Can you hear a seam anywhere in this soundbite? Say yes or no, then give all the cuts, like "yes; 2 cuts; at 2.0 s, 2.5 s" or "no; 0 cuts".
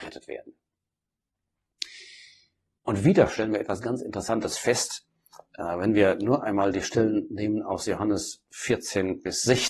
yes; 1 cut; at 2.8 s